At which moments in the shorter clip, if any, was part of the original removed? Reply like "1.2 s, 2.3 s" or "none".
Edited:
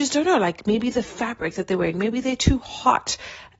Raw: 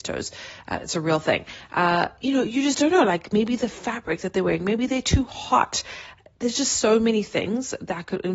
none